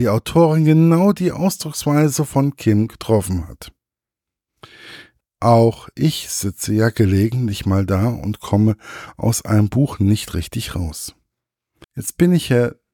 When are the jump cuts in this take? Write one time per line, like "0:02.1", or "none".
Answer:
0:05.2
0:11.8